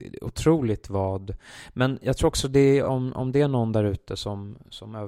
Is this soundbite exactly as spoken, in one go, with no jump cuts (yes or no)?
yes